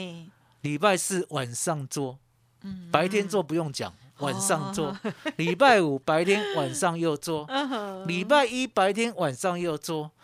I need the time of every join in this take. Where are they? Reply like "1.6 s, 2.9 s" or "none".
none